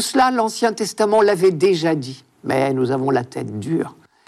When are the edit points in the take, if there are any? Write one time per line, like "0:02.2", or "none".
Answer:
0:02.3

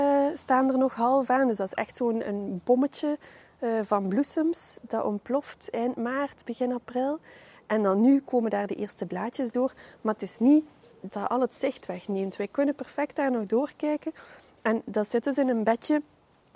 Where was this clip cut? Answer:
0:11.1

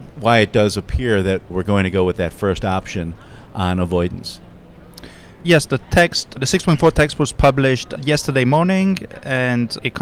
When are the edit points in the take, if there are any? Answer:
none

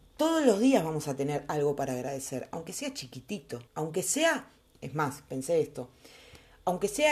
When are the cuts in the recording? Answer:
0:03.7

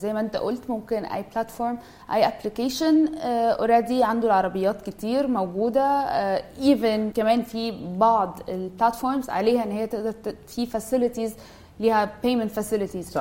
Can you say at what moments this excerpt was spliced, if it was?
0:07.1

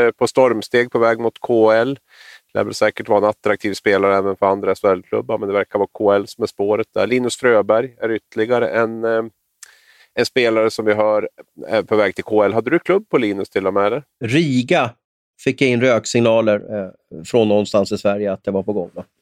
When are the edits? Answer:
0:16.7

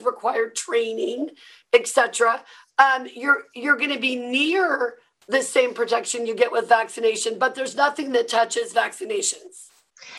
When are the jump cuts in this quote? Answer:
none

